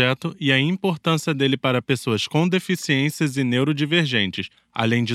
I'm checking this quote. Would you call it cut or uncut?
uncut